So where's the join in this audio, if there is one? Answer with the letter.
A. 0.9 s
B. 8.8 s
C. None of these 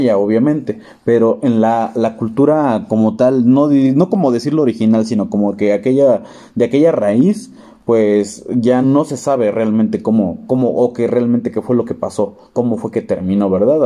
B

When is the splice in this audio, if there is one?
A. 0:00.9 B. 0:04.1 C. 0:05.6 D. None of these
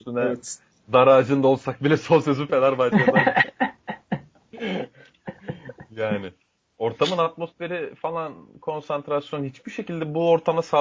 D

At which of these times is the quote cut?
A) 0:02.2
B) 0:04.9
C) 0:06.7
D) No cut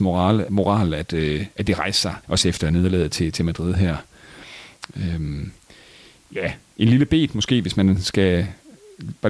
A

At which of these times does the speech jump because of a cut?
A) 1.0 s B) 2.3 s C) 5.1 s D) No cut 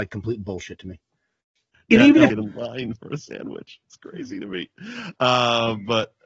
B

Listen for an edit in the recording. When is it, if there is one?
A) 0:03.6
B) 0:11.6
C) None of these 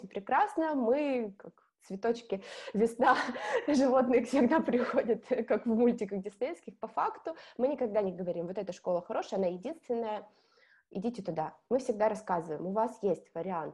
C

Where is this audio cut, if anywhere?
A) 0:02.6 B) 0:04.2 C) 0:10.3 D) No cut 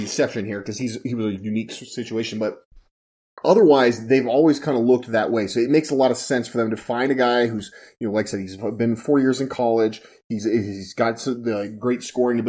D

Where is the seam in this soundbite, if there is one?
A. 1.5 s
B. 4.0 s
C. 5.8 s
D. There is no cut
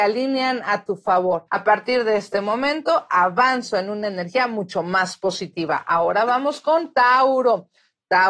A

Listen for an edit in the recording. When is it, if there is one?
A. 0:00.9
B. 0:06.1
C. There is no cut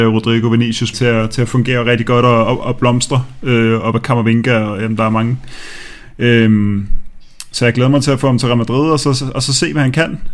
A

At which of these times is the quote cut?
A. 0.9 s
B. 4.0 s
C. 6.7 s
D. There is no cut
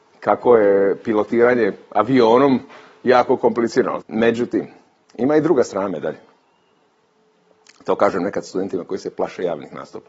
B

